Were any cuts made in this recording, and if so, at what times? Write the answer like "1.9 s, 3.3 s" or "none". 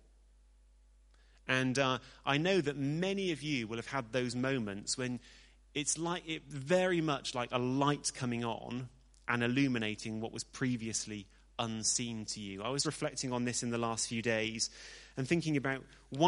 12.8 s